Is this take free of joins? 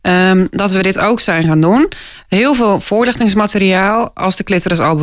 yes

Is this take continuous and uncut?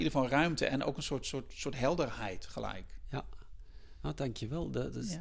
yes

